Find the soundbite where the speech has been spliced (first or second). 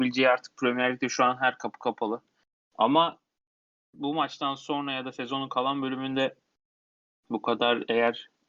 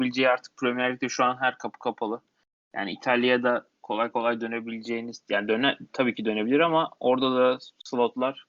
first